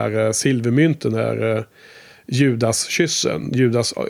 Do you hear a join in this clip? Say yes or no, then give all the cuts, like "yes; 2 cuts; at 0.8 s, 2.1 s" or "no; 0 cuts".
no; 0 cuts